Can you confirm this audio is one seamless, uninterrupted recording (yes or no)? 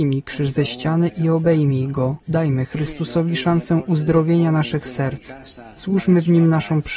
no